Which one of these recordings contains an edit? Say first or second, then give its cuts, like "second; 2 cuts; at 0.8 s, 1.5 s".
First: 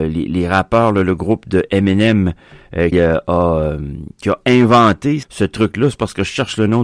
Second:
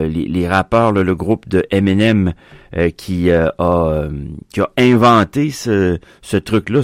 first; 2 cuts; at 2.9 s, 5.2 s